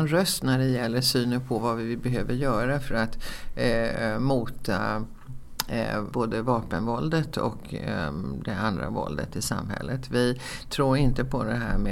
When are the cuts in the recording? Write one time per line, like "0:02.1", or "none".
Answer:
0:06.1